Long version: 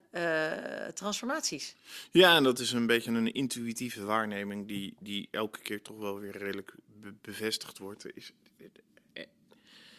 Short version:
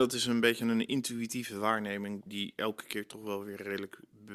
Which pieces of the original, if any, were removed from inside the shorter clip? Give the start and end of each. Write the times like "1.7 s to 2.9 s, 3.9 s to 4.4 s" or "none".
4.7 s to 5.0 s